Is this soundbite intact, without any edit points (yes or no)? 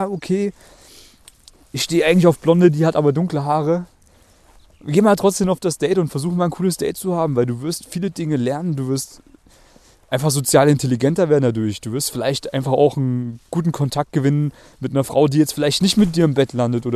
yes